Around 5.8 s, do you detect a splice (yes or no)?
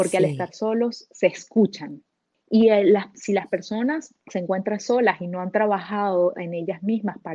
no